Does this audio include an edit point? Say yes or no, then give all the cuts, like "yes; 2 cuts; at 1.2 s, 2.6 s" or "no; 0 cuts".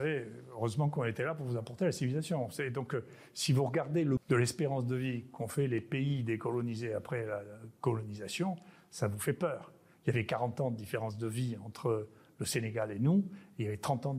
yes; 1 cut; at 4.2 s